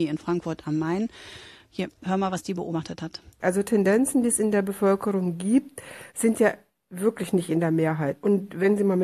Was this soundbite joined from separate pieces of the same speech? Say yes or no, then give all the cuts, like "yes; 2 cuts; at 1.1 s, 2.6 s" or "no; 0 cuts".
yes; 2 cuts; at 3.3 s, 6.1 s